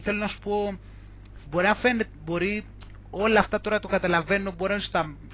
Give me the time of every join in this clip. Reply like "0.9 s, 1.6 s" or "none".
none